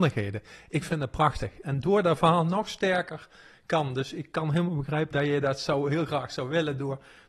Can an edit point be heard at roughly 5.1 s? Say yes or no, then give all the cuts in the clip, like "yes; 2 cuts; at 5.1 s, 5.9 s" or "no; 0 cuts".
yes; 2 cuts; at 1.6 s, 5.1 s